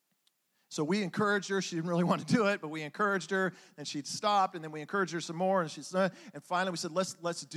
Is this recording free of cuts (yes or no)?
yes